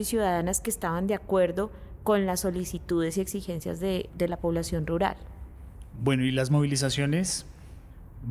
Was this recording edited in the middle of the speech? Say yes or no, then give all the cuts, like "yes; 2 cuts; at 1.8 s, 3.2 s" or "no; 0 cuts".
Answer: no; 0 cuts